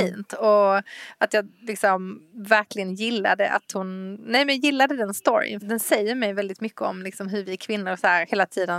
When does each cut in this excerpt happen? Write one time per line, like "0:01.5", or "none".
0:05.6